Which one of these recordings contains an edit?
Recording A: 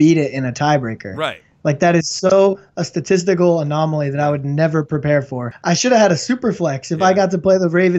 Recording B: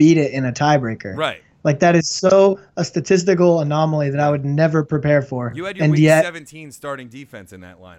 A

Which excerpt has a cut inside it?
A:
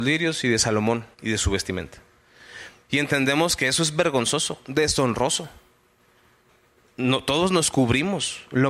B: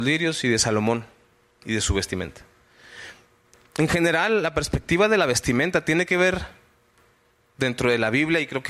A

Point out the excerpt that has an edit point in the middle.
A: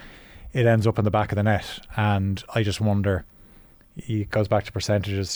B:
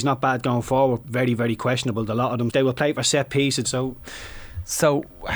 B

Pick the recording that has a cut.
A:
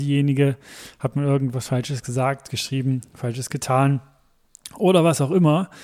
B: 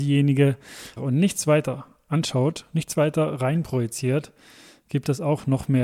B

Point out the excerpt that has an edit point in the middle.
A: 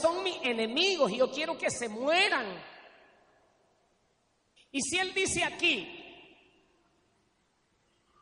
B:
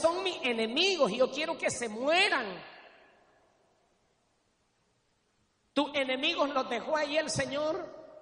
A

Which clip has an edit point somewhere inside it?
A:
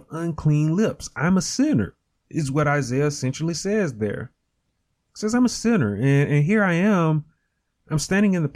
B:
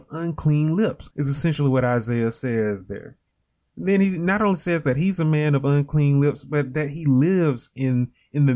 B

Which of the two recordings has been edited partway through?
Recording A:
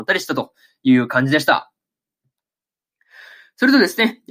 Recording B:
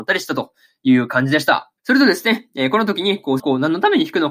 B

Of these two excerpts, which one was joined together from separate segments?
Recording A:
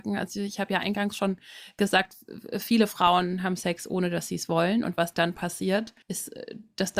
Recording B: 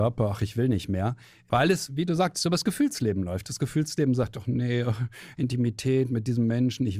A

